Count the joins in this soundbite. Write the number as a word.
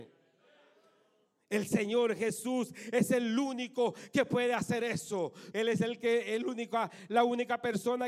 one